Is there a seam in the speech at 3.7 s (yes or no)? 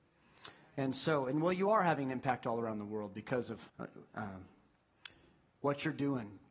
yes